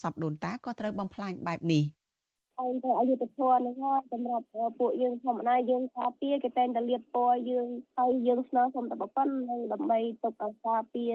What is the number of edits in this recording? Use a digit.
0